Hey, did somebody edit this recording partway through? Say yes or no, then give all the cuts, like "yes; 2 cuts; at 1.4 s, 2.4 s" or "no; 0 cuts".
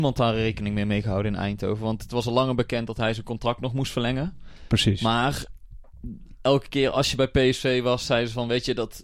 no; 0 cuts